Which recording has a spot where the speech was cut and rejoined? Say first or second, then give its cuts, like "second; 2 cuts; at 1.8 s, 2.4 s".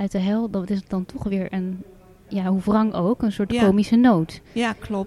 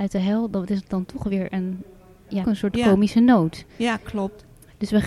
second; 1 cut; at 2.4 s